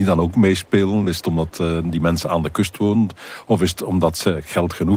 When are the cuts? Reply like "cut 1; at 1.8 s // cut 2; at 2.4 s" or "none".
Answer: none